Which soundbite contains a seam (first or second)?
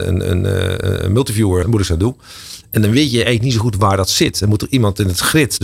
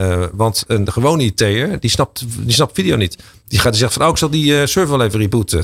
first